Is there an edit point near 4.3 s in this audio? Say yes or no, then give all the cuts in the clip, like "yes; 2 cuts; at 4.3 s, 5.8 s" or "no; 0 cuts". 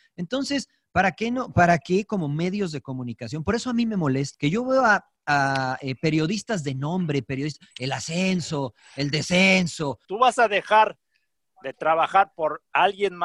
yes; 2 cuts; at 4.3 s, 10.1 s